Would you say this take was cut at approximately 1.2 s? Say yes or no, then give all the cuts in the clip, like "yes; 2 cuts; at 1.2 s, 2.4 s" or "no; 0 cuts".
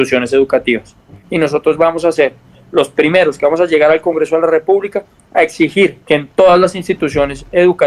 yes; 2 cuts; at 1.2 s, 6.0 s